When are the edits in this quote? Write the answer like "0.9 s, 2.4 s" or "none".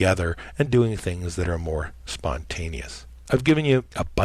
none